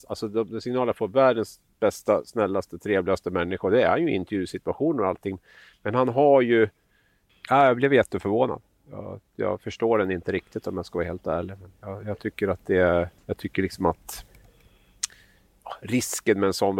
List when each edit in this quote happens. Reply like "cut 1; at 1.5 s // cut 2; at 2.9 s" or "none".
cut 1; at 7.3 s // cut 2; at 13.2 s